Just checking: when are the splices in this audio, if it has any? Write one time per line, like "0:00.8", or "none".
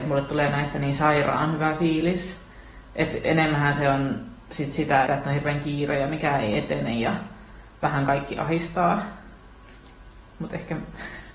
0:05.1